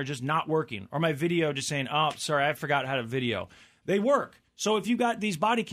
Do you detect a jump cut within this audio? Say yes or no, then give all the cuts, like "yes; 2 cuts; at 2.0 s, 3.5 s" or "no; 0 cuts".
no; 0 cuts